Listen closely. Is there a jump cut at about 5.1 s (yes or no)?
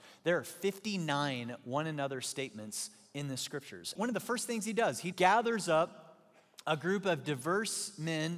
yes